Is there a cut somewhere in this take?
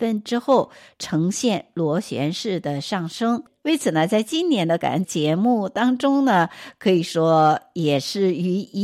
yes; 1 cut; at 5.0 s

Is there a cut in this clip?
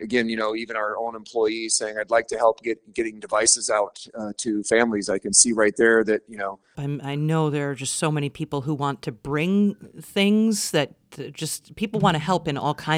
yes; 1 cut; at 6.7 s

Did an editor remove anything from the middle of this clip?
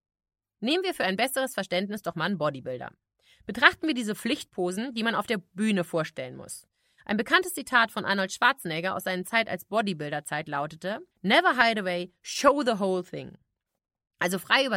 yes; 2 cuts; at 6.9 s, 11.1 s

